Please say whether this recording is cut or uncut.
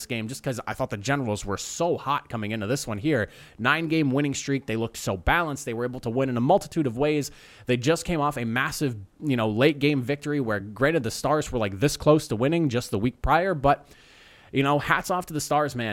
uncut